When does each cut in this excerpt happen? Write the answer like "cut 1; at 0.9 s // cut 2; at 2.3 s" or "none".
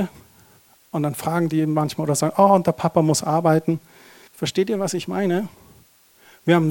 cut 1; at 4.3 s